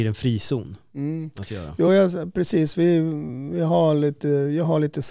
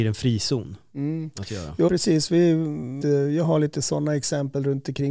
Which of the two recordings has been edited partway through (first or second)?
second